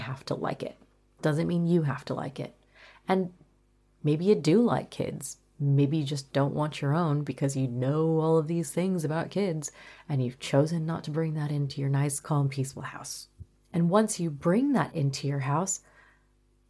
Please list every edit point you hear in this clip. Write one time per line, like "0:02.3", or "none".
none